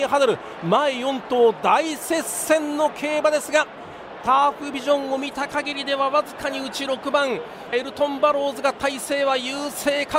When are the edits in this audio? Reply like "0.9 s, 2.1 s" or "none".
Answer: 7.7 s